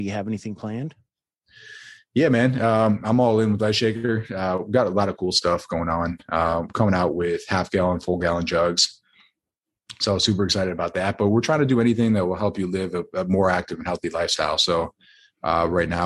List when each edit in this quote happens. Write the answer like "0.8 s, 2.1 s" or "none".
none